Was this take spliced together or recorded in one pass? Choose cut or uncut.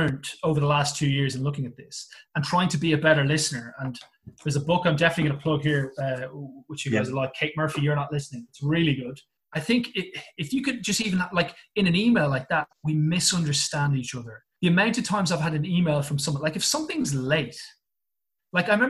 cut